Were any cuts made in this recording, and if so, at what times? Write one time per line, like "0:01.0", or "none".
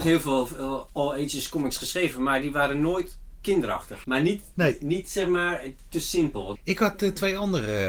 0:04.0
0:06.6